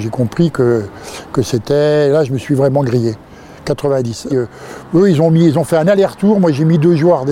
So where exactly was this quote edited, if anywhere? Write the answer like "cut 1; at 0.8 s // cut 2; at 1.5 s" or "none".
cut 1; at 4.3 s

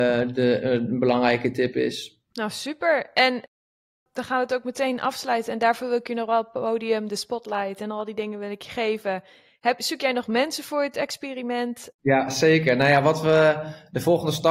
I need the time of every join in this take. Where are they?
cut 1; at 2.3 s // cut 2; at 11.9 s

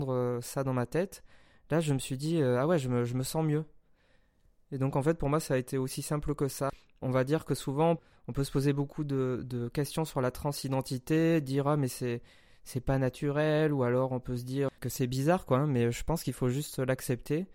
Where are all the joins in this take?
none

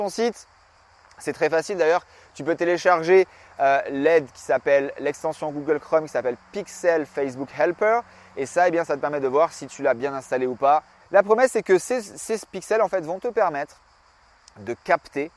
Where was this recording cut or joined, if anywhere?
cut 1; at 11.0 s

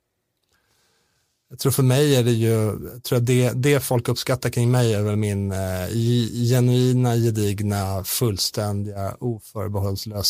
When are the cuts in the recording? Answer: none

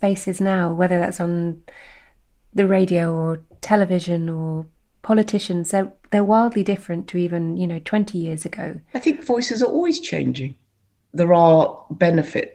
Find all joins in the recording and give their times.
none

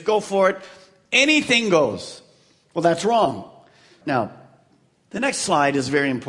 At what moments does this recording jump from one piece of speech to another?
cut 1; at 4.0 s

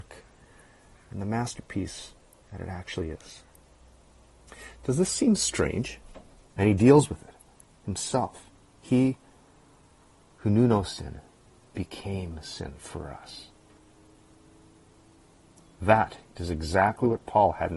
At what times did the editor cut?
cut 1; at 6.5 s // cut 2; at 16.3 s

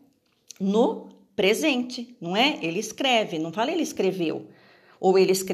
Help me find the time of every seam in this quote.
none

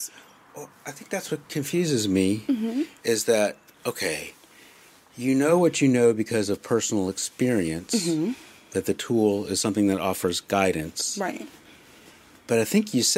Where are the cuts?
none

